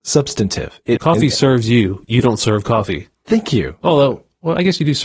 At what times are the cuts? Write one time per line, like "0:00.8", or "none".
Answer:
0:01.0

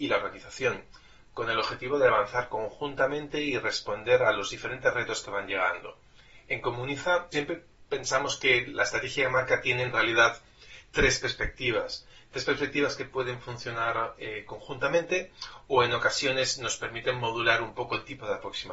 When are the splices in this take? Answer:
0:07.3

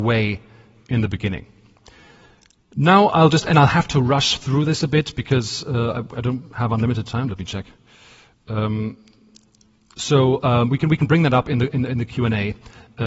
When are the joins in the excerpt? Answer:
none

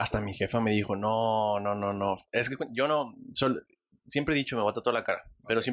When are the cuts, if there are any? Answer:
none

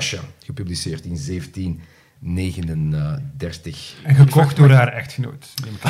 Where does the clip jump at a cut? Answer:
none

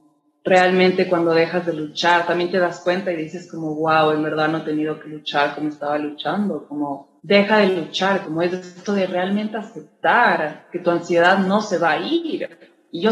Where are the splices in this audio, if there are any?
0:07.2
0:08.2

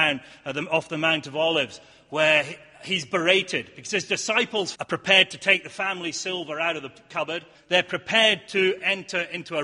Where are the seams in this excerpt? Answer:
0:04.7
0:07.5

